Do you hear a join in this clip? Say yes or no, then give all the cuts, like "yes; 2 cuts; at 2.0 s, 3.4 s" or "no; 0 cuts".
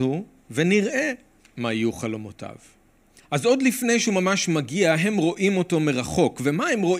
yes; 1 cut; at 3.2 s